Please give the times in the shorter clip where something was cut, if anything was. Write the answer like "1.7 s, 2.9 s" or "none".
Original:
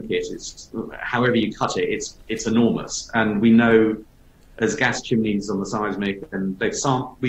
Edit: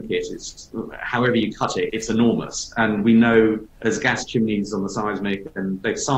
1.9 s, 3.7 s